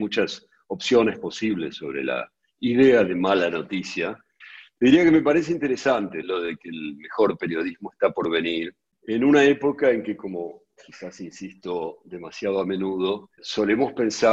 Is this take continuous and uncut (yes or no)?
yes